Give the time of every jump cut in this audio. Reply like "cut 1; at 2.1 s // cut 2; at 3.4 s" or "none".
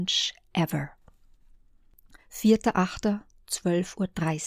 none